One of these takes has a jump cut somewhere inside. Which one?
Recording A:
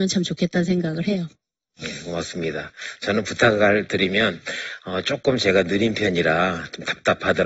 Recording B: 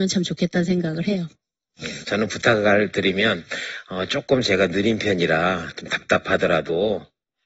B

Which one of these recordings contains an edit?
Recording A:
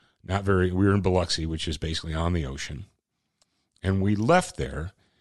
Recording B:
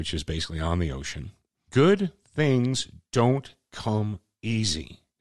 B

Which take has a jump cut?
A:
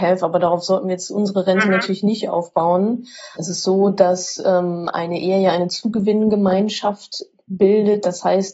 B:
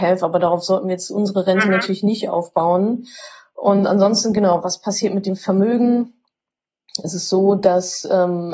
A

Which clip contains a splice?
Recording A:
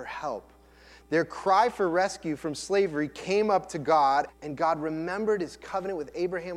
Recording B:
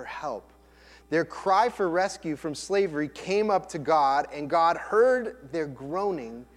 A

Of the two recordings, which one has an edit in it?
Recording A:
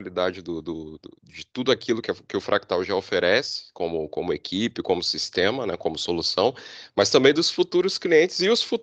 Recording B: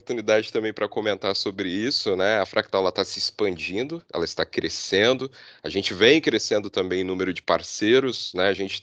A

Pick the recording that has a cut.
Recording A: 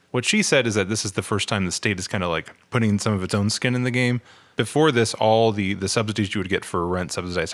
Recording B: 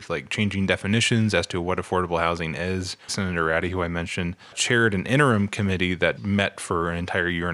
B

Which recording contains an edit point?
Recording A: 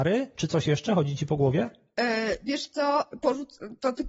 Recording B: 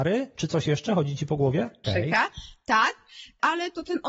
B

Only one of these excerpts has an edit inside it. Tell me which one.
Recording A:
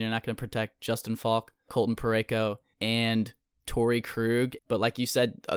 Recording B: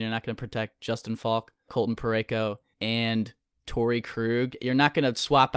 A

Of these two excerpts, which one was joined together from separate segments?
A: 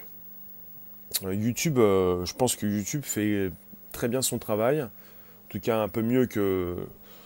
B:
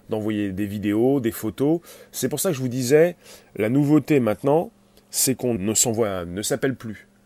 B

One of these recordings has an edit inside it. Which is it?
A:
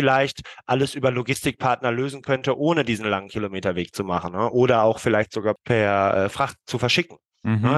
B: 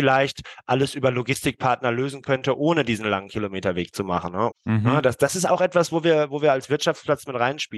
B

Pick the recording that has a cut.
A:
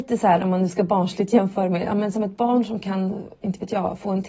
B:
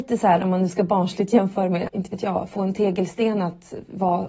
B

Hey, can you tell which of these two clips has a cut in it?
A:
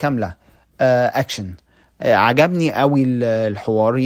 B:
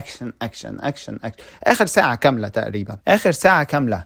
B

